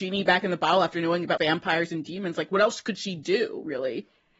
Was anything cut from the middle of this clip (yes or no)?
yes